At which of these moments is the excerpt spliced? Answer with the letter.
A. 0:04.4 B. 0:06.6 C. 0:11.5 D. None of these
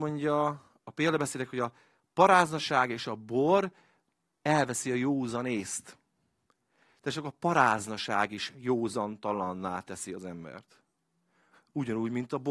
D